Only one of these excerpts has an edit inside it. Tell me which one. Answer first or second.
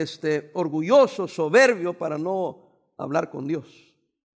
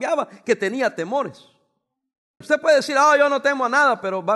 second